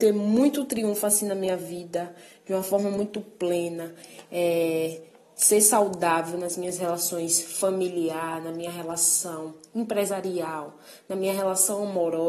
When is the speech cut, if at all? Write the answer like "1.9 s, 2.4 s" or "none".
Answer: none